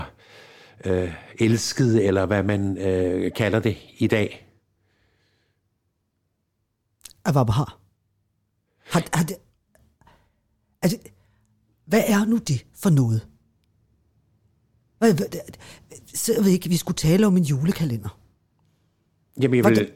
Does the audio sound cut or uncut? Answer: uncut